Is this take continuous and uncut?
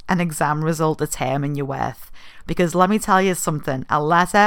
yes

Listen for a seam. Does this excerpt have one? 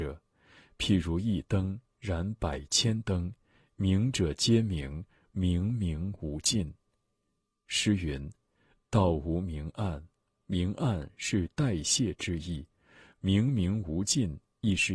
no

